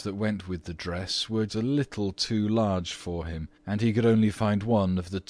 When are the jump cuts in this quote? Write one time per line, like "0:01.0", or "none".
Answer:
0:01.5
0:03.6